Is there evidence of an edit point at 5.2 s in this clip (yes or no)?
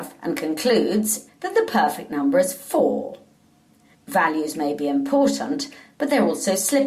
no